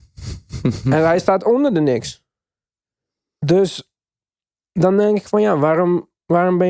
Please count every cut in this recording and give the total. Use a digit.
0